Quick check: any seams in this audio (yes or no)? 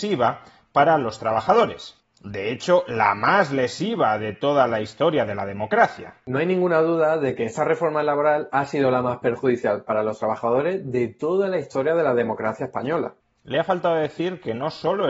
no